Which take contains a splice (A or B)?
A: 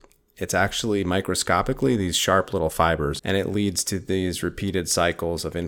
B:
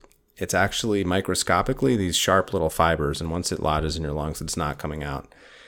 A